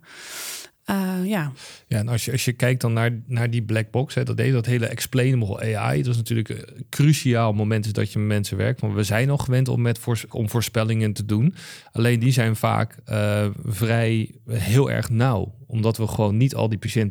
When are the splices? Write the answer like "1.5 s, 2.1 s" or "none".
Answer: 10.3 s

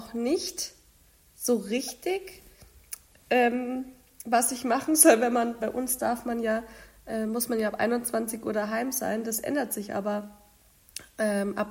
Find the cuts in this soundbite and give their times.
5.6 s

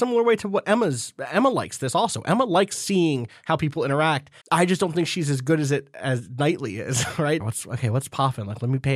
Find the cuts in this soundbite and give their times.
4.4 s, 7.4 s

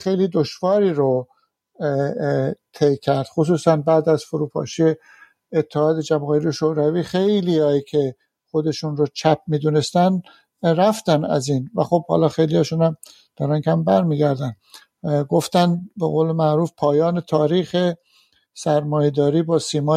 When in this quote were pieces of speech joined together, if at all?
13.6 s

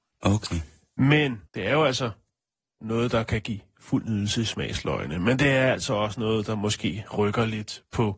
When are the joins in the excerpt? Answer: 1.5 s

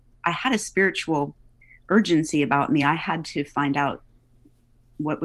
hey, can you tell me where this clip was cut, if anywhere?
none

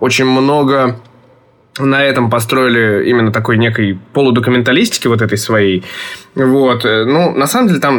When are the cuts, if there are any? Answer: none

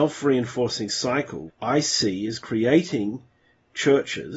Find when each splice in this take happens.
1.5 s

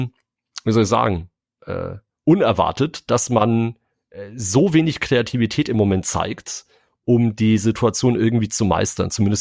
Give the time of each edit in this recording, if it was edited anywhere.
none

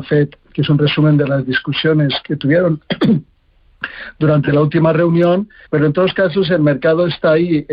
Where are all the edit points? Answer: 5.7 s

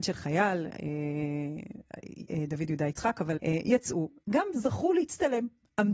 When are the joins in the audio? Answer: 3.4 s

